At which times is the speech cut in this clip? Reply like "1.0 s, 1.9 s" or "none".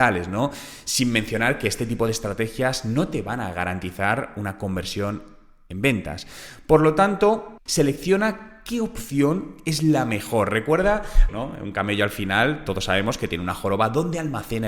7.7 s, 11.3 s